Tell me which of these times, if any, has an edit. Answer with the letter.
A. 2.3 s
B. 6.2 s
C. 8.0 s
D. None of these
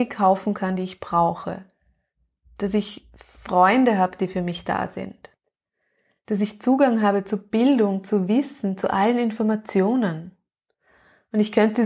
D